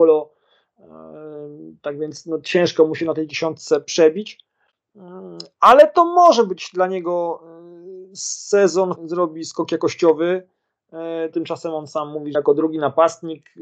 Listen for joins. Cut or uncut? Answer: cut